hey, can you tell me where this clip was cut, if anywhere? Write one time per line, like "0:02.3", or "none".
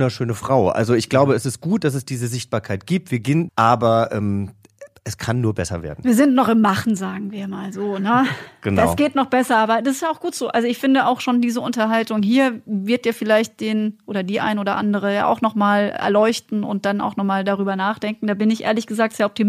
0:03.5